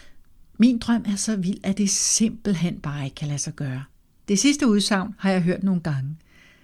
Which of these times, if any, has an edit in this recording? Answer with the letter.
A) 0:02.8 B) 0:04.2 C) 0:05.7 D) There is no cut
B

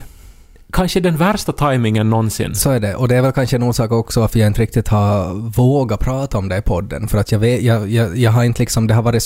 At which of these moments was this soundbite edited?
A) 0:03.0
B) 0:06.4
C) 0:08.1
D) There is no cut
D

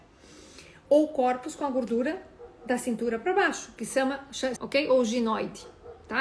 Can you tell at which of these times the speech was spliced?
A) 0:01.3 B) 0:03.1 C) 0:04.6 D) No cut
C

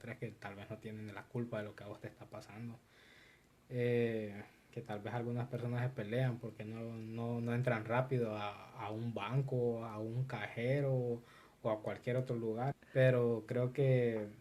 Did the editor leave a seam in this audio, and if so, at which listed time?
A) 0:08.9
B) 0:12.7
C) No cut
B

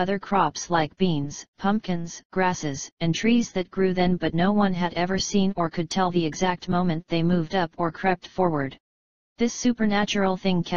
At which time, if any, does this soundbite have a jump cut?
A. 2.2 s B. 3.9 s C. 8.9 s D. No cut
A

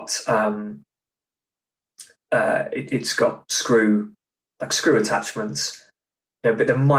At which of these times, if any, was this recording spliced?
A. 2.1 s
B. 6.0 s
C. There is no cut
C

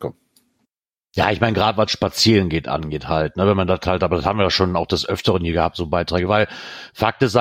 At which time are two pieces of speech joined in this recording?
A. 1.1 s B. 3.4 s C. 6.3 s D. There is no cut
C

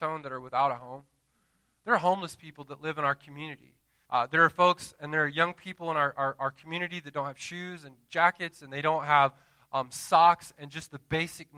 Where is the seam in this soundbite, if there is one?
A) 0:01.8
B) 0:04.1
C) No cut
B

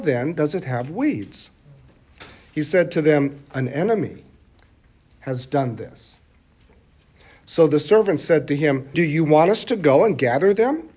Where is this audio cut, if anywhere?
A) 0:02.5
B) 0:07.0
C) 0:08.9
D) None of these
C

